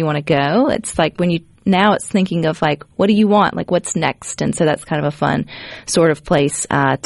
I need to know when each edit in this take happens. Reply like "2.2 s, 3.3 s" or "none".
none